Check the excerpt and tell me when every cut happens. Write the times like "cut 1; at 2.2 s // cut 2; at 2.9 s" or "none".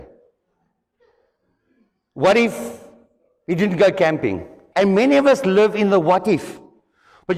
cut 1; at 4.7 s